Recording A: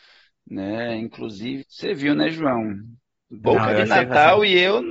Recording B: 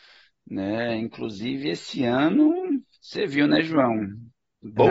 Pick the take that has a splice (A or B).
A